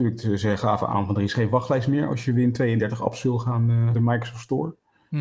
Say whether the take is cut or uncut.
cut